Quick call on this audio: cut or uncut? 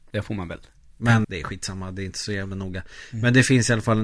cut